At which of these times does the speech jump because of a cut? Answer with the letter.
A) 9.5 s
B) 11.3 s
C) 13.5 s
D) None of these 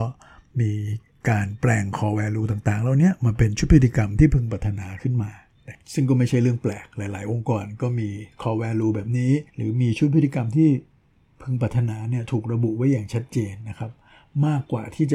A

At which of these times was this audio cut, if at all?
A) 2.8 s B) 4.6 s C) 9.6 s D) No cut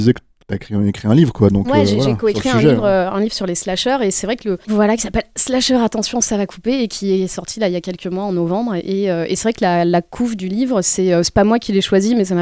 B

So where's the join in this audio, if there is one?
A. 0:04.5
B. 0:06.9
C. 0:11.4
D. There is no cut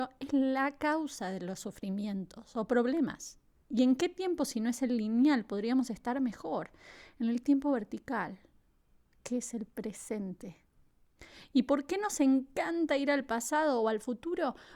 D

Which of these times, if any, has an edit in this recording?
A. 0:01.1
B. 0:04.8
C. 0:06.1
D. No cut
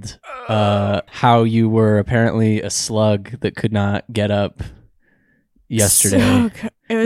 A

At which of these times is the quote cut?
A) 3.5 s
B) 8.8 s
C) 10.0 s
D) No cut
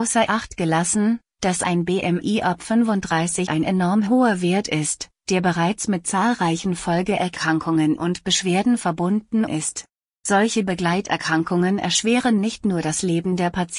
A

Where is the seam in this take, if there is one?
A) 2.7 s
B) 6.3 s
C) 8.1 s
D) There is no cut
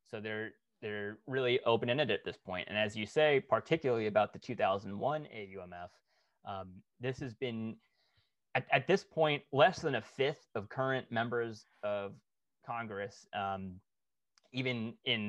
D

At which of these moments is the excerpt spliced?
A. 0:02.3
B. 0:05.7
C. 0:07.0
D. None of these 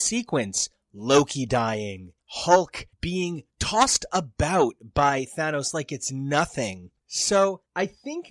C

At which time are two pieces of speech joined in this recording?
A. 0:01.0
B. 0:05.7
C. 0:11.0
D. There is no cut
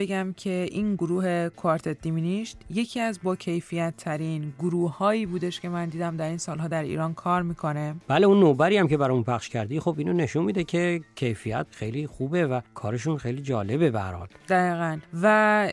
A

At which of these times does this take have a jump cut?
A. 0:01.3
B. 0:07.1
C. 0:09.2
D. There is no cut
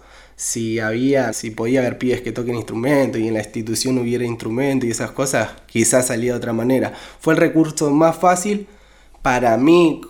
A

